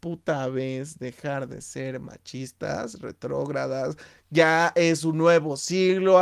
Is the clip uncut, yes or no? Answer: yes